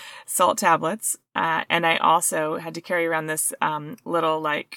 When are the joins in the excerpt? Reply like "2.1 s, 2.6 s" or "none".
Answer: none